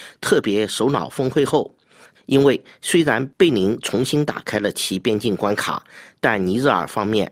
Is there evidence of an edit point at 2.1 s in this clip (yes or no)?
yes